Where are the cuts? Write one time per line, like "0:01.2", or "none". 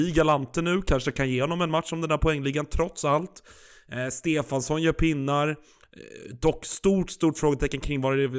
none